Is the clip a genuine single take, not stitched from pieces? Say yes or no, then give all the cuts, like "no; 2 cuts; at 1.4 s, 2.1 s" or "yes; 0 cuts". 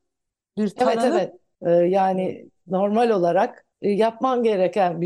no; 2 cuts; at 1.5 s, 3.7 s